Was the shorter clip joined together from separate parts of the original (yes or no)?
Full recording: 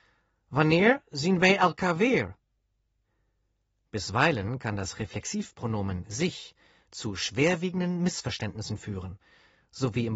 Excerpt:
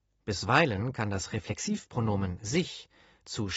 no